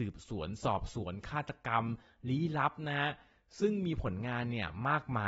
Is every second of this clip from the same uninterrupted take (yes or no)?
yes